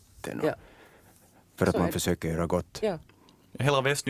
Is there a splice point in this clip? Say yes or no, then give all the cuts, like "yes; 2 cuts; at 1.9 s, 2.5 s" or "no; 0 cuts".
no; 0 cuts